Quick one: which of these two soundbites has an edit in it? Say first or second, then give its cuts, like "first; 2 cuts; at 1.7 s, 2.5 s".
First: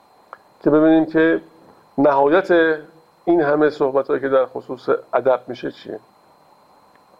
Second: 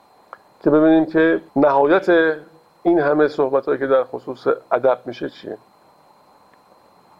second; 1 cut; at 1.5 s